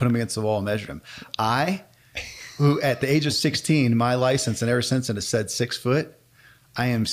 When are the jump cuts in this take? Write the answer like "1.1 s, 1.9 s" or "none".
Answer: none